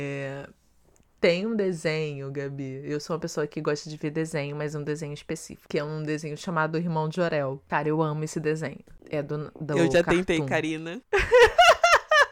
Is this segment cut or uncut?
uncut